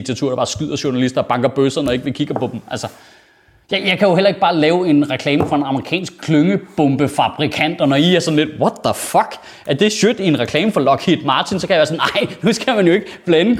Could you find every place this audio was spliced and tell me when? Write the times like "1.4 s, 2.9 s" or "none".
none